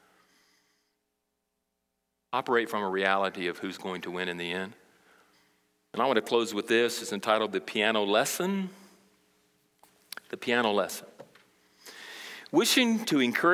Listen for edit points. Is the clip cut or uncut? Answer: uncut